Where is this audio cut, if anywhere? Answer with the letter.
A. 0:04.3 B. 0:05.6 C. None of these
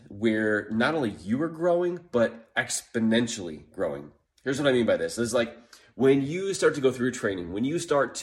C